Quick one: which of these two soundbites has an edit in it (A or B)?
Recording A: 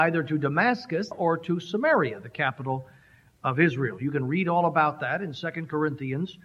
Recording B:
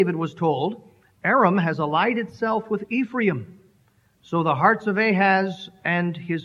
A